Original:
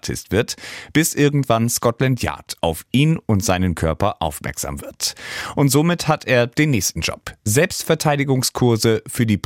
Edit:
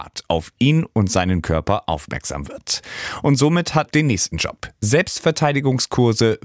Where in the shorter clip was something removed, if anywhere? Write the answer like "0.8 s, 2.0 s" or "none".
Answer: 3.9 s